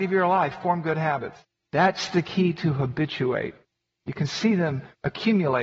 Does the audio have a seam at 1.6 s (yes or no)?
yes